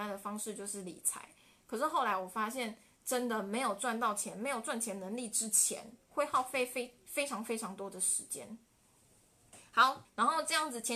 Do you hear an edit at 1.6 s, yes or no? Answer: no